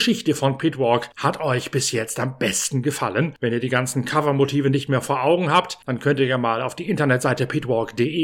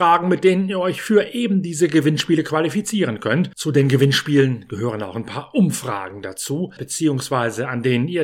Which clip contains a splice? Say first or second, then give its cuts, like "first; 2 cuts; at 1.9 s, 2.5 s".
second; 1 cut; at 6.8 s